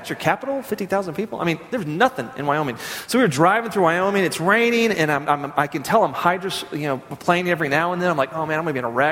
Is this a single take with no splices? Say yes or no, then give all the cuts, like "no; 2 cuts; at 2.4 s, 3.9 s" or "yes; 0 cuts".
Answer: yes; 0 cuts